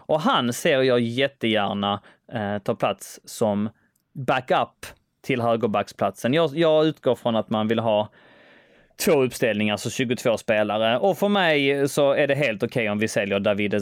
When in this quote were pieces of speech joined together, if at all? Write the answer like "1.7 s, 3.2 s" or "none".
none